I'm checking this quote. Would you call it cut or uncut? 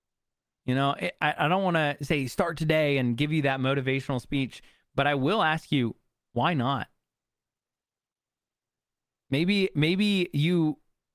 uncut